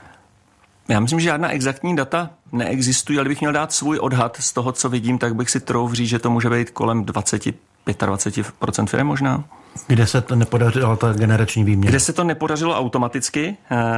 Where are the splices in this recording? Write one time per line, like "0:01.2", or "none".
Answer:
0:04.7